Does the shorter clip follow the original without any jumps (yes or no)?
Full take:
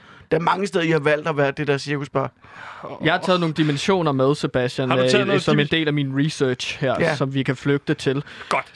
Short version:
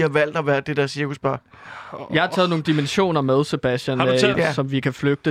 no